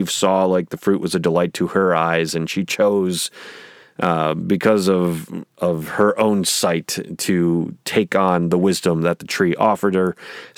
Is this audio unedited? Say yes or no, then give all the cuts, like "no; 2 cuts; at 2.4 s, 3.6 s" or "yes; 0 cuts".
yes; 0 cuts